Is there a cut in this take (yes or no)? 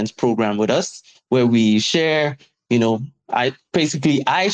no